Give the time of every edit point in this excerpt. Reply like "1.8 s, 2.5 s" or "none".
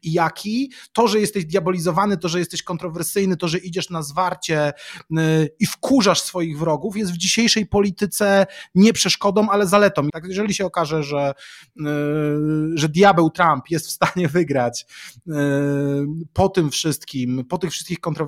2.2 s, 10.1 s